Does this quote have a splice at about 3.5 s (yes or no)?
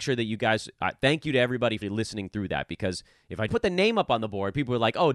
yes